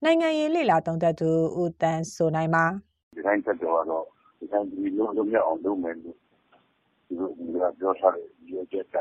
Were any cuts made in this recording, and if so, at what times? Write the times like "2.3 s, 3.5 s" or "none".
none